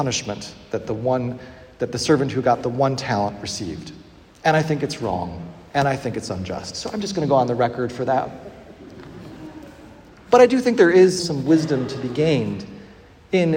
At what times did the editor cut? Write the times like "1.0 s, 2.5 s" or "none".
11.2 s